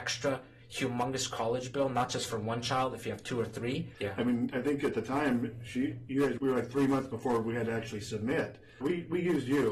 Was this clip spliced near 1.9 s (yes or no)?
no